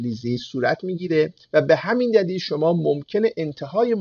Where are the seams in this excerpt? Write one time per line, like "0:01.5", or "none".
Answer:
0:01.4

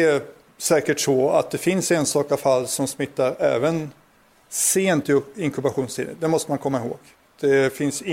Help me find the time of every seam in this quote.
none

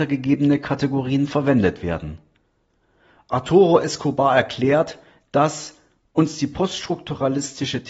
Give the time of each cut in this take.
none

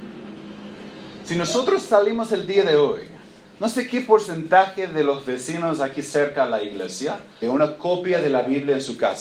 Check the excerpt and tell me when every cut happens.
0:07.4

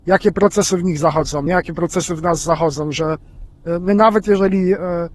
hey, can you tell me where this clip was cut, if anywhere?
none

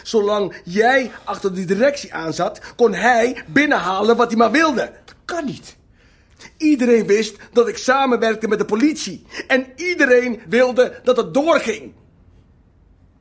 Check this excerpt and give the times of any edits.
none

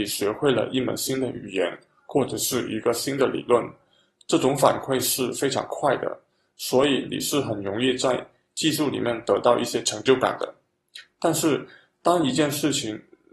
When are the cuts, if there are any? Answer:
none

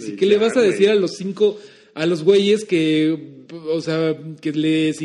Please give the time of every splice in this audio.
0:03.4

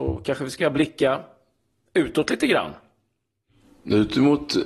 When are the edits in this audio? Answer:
none

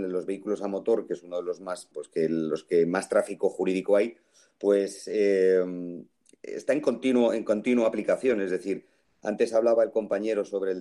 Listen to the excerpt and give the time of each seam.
0:01.9

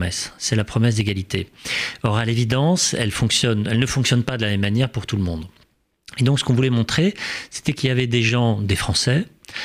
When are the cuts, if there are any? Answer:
none

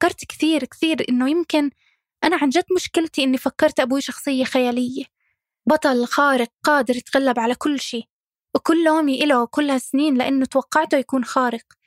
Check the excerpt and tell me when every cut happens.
none

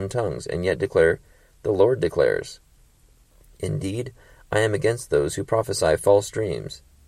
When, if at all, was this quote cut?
none

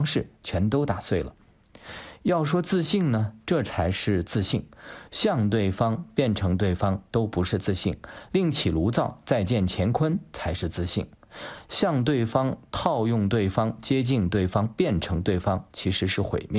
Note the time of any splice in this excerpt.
none

